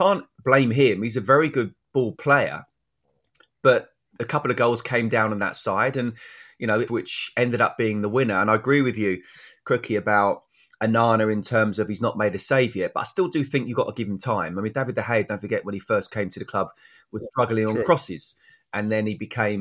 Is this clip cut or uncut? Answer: cut